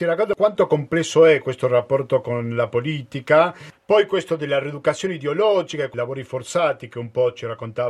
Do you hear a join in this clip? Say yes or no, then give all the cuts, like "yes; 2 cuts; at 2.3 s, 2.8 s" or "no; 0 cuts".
yes; 1 cut; at 3.7 s